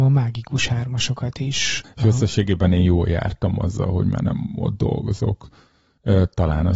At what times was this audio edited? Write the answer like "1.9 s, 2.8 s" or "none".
1.8 s